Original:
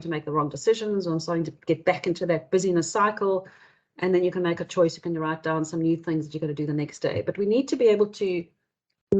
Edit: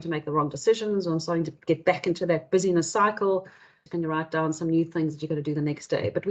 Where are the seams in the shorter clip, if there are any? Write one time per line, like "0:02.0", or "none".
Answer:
0:03.9